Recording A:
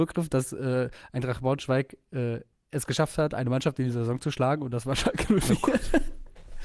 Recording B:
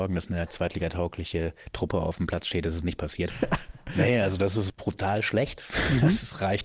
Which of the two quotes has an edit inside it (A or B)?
B